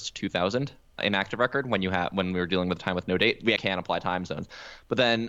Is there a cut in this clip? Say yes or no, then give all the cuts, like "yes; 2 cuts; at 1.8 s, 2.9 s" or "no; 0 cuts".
yes; 1 cut; at 3.6 s